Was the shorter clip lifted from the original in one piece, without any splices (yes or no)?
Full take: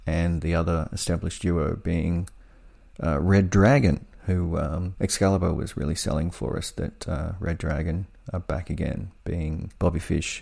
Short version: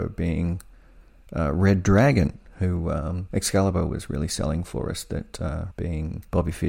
no